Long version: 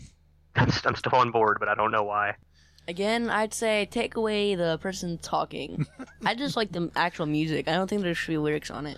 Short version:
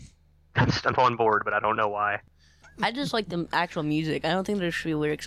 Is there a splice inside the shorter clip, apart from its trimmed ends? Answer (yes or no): yes